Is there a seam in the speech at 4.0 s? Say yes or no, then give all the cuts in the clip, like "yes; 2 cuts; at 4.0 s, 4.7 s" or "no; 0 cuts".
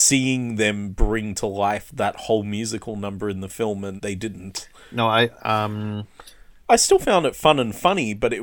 yes; 2 cuts; at 4.0 s, 5.4 s